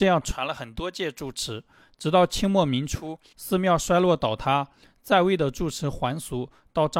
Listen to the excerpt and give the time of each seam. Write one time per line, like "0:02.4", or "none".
none